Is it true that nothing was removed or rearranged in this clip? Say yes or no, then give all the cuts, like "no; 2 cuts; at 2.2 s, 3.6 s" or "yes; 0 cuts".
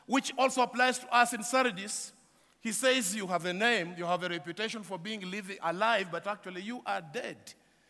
yes; 0 cuts